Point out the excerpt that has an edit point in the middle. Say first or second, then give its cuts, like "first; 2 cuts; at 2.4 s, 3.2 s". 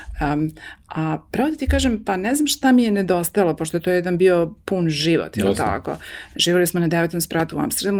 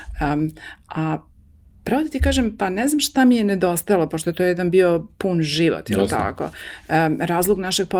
first; 2 cuts; at 1.3 s, 6.3 s